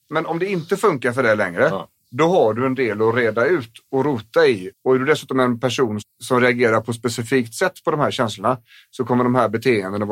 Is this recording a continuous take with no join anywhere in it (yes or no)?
no